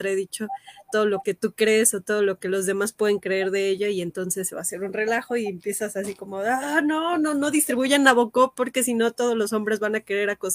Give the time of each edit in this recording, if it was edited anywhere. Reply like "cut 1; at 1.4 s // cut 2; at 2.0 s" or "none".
none